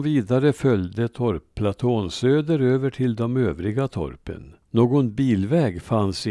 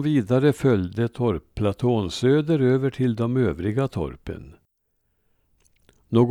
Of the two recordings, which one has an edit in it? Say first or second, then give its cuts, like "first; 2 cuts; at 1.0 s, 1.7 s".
first; 1 cut; at 4.6 s